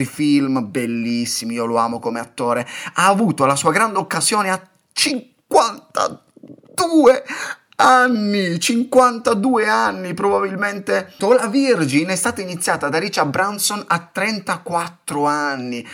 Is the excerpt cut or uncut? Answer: cut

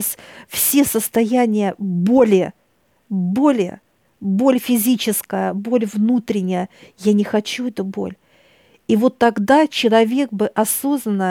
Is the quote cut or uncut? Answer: uncut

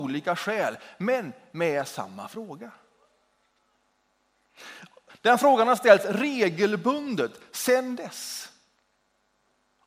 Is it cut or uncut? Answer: cut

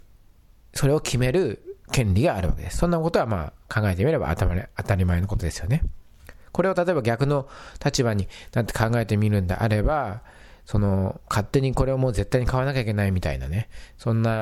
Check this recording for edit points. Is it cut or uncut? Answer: uncut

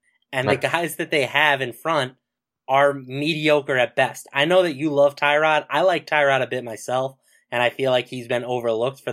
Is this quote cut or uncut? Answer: uncut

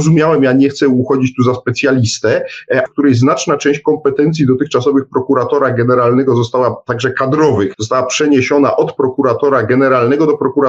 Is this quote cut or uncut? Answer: cut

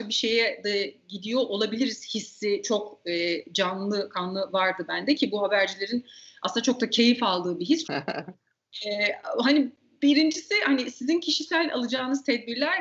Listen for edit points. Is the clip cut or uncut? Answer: cut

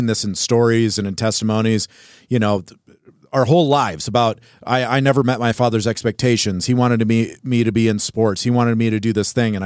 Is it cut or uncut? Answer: uncut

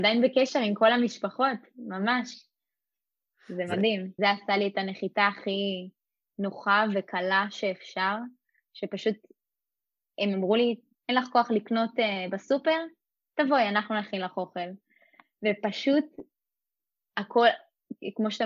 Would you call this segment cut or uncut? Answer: cut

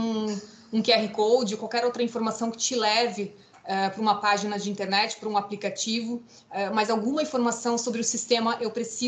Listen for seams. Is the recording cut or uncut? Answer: uncut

